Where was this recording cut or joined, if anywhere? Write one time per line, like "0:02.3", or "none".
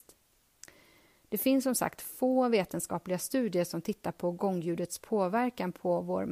none